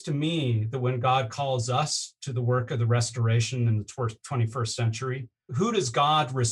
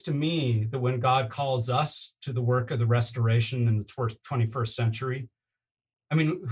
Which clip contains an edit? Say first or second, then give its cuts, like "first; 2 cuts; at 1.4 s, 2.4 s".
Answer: first; 1 cut; at 5.5 s